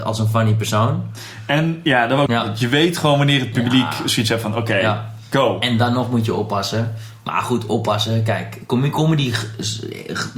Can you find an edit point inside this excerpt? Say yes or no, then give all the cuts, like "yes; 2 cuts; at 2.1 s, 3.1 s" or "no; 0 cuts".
yes; 1 cut; at 2.3 s